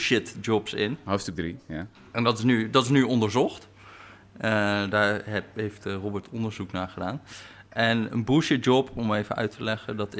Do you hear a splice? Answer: no; 0 cuts

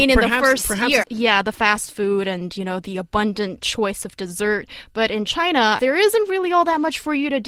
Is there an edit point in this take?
yes; 2 cuts; at 1.0 s, 5.8 s

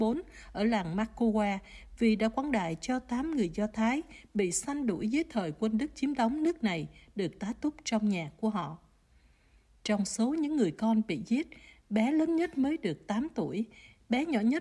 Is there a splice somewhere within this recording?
no; 0 cuts

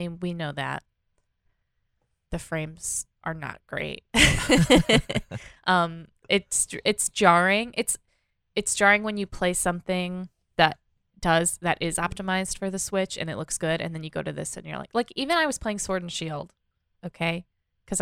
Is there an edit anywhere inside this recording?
no; 0 cuts

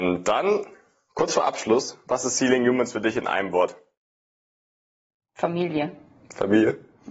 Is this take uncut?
yes; 0 cuts

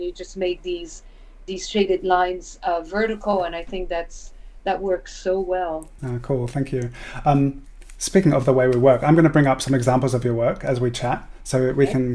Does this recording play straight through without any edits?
yes; 0 cuts

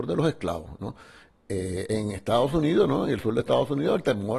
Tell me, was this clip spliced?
no; 0 cuts

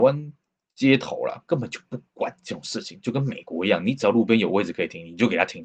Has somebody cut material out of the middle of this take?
no; 0 cuts

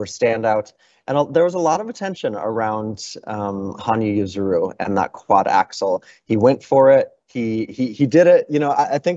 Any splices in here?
no; 0 cuts

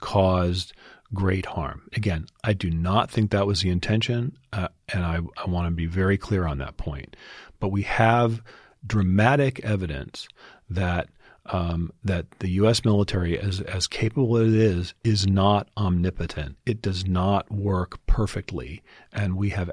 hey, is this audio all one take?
yes; 0 cuts

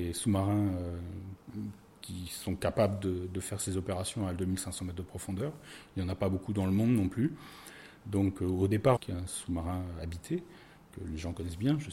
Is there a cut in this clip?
yes; 1 cut; at 9.0 s

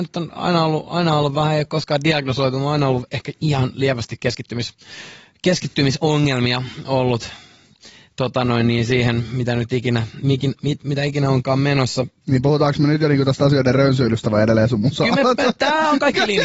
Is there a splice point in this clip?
no; 0 cuts

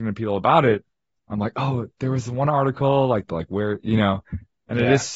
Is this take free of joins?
no; 1 cut; at 3.3 s

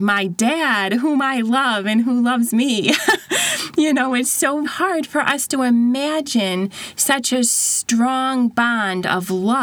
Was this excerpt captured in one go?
no; 2 cuts; at 3.2 s, 4.6 s

